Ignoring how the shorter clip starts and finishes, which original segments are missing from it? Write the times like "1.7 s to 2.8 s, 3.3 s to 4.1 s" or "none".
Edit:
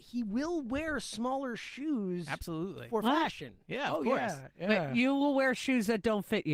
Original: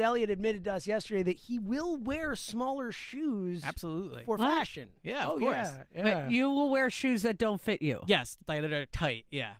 none